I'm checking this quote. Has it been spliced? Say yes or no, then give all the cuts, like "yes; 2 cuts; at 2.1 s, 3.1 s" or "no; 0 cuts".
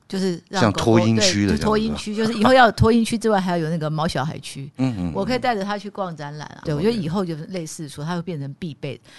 yes; 1 cut; at 6.6 s